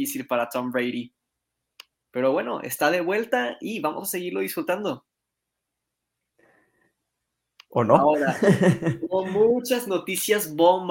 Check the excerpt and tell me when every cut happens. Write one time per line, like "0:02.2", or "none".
none

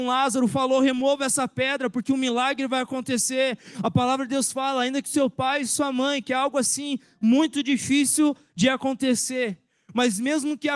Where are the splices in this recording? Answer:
0:03.7

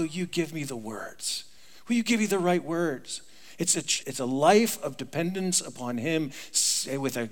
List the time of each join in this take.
0:04.0

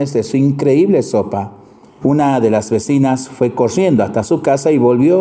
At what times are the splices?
0:02.0

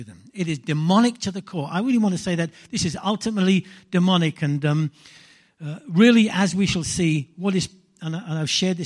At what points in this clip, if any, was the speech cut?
none

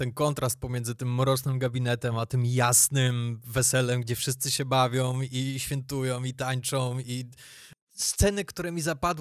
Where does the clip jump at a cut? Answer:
none

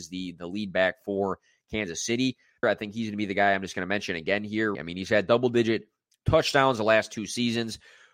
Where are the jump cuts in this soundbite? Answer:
0:02.6
0:04.8

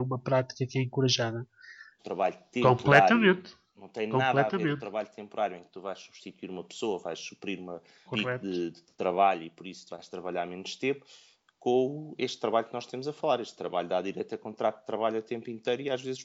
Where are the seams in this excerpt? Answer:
0:02.0
0:08.1

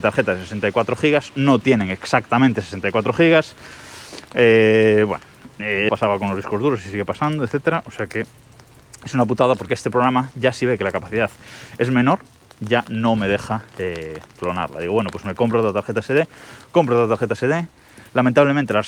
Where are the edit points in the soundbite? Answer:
0:05.9

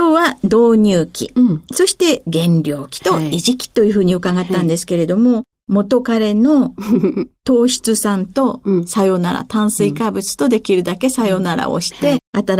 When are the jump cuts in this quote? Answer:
0:05.5

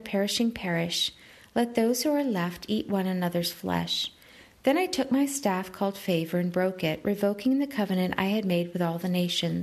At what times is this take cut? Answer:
none

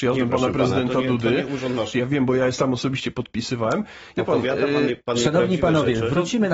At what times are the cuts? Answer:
0:01.9
0:04.1

